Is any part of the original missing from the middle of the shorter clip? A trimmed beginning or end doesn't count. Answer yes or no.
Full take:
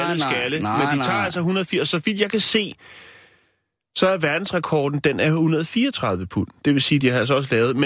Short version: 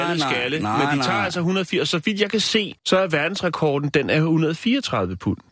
yes